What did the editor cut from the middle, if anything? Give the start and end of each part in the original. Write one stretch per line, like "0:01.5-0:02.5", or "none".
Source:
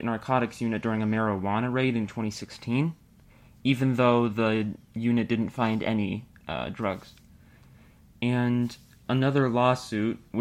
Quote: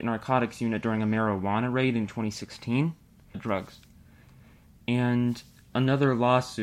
0:03.3-0:06.7